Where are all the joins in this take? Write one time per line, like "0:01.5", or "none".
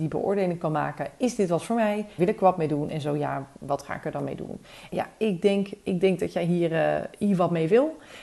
0:02.2
0:04.9

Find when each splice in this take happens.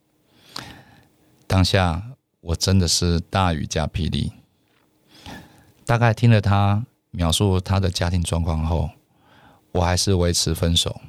none

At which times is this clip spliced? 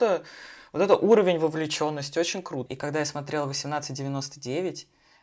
0:02.7

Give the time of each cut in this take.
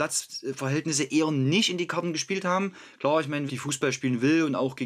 0:03.5

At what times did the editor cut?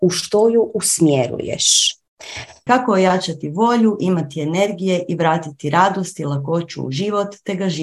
0:02.7

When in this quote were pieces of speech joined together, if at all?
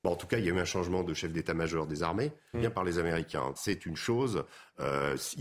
0:02.5
0:03.6

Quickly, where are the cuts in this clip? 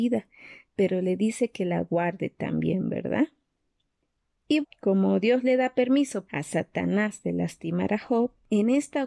0:04.6
0:06.3

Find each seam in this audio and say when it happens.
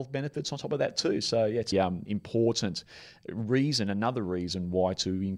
0:01.7

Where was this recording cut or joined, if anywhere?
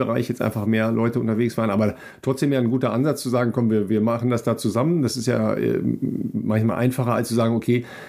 none

